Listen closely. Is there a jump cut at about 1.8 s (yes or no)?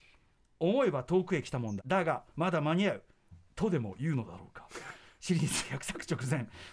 yes